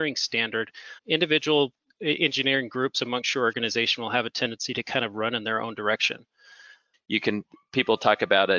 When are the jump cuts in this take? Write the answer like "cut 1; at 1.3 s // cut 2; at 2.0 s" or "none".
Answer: cut 1; at 1.0 s // cut 2; at 6.9 s